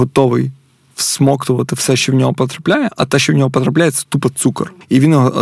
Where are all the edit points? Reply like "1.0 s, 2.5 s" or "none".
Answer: none